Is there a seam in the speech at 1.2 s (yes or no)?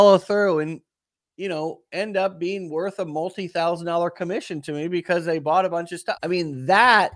no